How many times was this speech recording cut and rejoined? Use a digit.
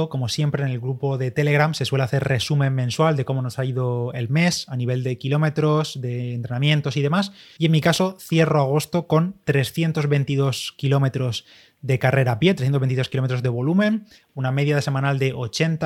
1